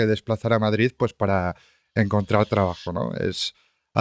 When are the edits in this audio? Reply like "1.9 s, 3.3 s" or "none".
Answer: none